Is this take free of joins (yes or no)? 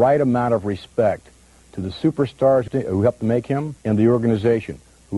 no